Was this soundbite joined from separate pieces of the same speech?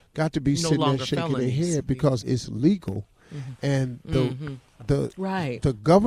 yes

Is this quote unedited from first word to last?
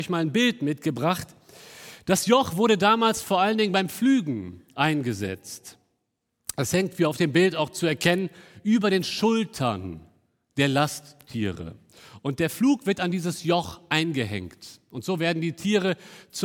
yes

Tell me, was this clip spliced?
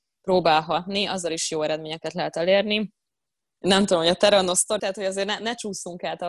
yes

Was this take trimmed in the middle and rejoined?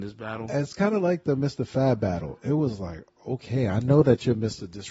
no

